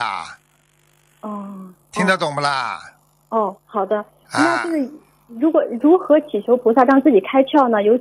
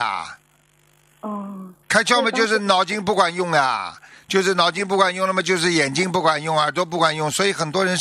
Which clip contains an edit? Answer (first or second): second